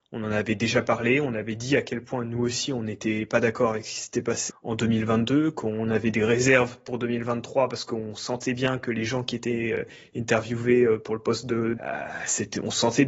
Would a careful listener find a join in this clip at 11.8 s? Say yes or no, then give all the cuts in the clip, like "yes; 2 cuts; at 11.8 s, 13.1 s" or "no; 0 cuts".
yes; 2 cuts; at 4.5 s, 11.8 s